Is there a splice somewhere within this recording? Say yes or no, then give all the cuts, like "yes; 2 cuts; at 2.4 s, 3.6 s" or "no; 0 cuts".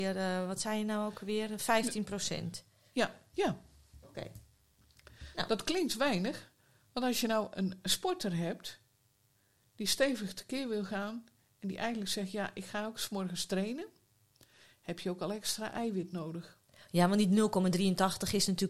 yes; 1 cut; at 3.3 s